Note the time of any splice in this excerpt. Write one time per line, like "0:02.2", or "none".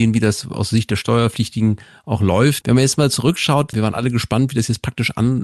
0:02.6
0:03.7